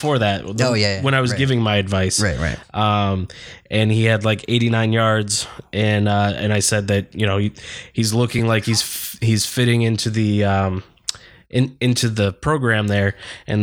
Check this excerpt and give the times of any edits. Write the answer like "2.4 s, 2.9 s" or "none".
none

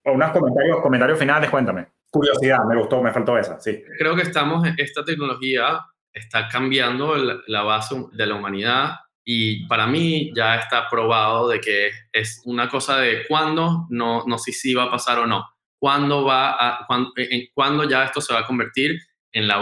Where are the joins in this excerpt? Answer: 2.0 s

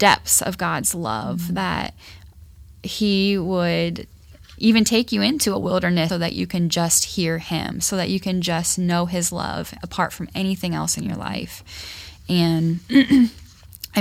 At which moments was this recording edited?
6.1 s

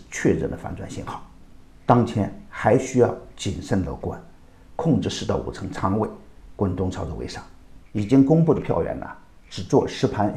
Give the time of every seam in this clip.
7.8 s

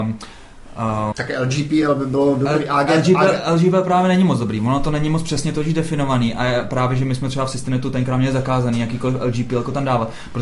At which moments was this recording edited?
1.1 s

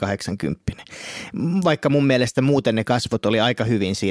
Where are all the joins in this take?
none

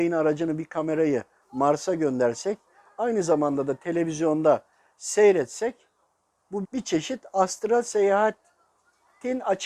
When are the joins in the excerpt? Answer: 6.6 s

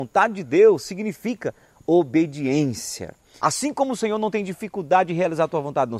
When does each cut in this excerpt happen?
3.4 s

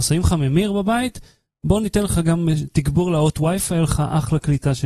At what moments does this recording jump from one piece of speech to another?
none

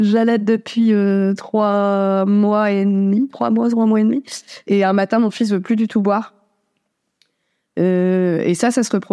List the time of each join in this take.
none

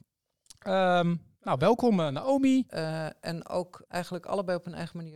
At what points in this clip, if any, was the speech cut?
2.7 s, 3.9 s

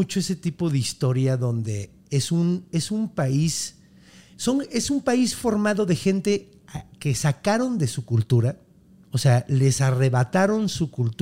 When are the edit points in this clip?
none

